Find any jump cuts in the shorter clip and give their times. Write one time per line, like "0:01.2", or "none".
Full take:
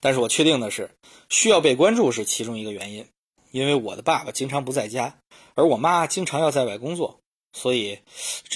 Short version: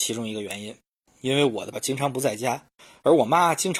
0:01.7